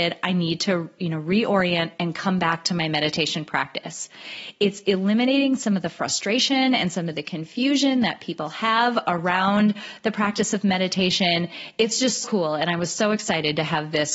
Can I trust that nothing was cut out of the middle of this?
no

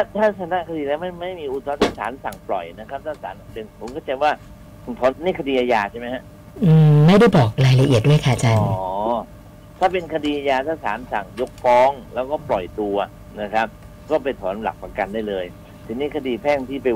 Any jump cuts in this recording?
yes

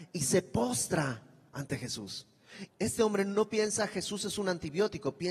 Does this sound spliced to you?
yes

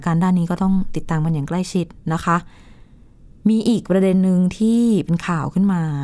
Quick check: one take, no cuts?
yes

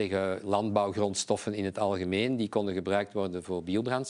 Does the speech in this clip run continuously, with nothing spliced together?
yes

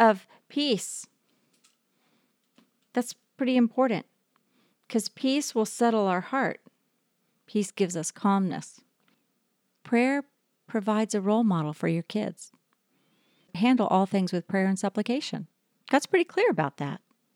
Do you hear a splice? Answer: no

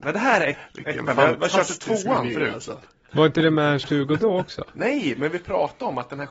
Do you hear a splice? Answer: no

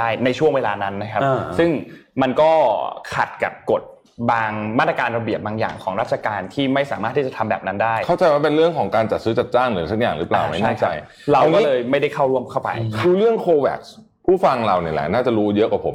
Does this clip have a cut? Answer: yes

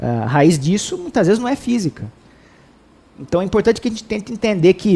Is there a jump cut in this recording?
no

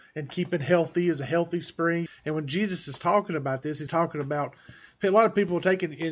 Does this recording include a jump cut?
yes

